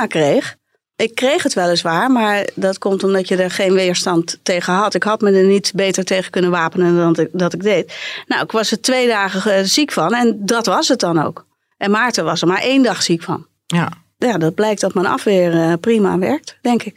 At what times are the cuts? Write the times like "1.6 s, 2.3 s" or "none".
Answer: none